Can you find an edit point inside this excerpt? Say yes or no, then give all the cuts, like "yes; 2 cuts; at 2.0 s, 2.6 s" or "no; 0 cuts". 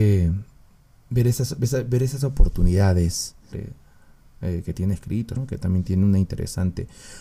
yes; 2 cuts; at 3.5 s, 5.4 s